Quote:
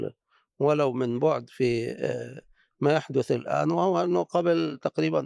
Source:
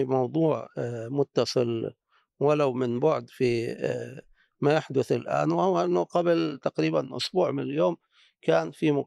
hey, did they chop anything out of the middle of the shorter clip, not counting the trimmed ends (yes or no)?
no